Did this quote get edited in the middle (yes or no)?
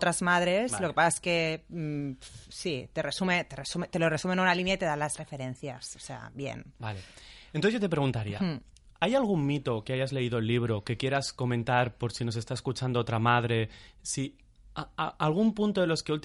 no